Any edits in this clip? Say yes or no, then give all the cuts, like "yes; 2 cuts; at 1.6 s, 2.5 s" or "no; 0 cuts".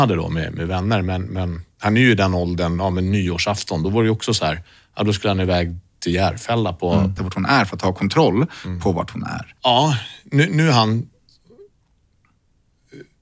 yes; 2 cuts; at 7.2 s, 9.6 s